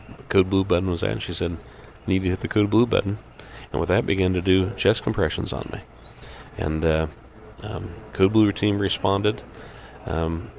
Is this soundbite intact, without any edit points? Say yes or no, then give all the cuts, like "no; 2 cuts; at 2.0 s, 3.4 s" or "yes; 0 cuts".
yes; 0 cuts